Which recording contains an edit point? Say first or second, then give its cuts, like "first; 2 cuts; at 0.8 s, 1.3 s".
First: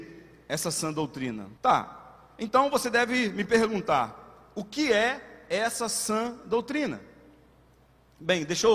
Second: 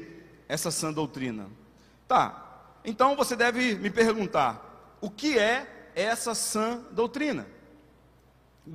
first; 1 cut; at 1.6 s